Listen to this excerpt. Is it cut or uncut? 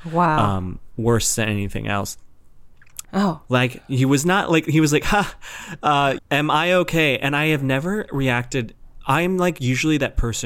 cut